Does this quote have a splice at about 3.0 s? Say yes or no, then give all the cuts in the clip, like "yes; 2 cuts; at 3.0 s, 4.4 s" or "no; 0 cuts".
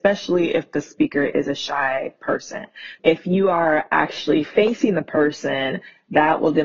yes; 1 cut; at 3.0 s